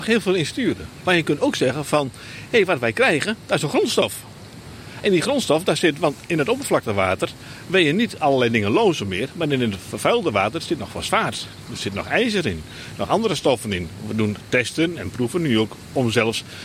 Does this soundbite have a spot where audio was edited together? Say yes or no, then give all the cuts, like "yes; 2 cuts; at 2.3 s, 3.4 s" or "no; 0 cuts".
no; 0 cuts